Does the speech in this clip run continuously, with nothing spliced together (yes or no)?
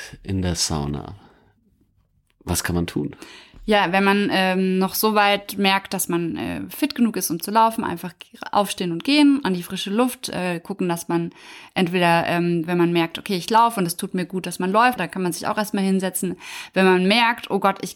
no